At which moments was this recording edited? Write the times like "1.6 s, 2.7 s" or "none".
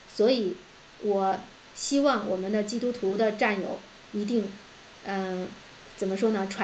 none